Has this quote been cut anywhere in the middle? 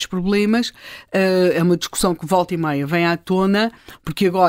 no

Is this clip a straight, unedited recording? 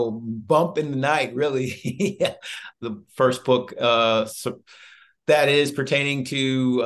no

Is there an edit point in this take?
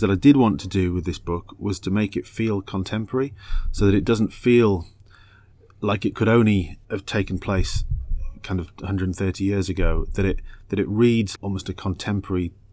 yes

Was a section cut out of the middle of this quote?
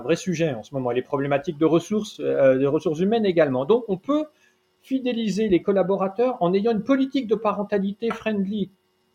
no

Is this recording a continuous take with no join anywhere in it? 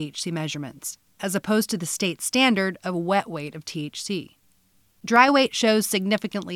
yes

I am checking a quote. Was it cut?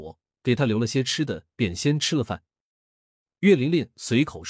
yes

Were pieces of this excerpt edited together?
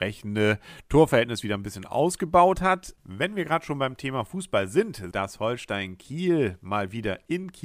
yes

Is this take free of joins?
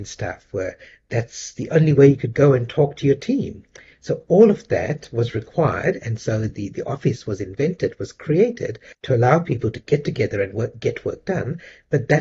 yes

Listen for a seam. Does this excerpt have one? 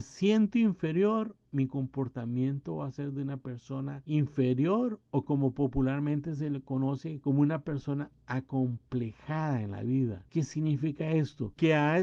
no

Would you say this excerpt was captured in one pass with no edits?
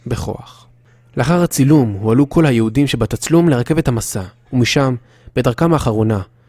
no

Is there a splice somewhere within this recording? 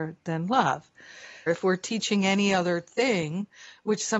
yes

